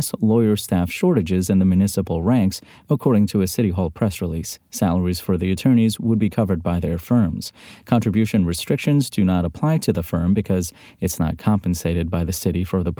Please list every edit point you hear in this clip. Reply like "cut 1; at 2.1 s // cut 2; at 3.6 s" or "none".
none